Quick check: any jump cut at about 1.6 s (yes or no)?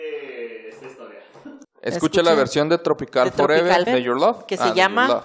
yes